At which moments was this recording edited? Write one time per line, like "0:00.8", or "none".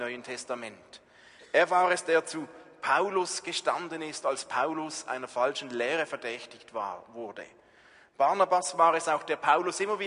none